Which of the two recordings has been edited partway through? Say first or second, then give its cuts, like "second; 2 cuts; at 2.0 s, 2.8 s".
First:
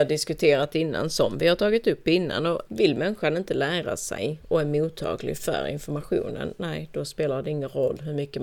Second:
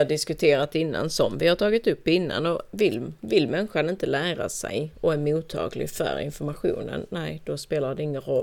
first; 1 cut; at 2.7 s